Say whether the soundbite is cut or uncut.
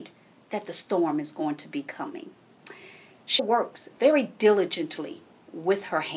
cut